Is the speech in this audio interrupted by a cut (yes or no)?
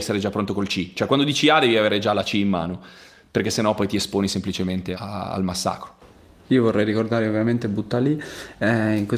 no